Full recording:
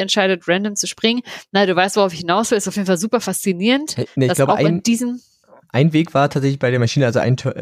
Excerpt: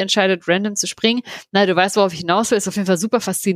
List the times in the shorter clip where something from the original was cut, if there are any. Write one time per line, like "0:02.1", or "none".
none